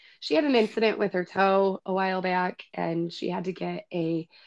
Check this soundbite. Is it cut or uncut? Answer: uncut